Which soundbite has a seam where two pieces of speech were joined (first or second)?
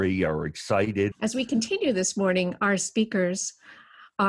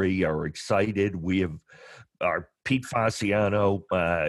first